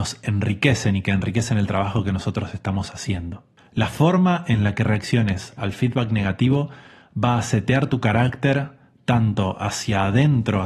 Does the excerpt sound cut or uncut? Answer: uncut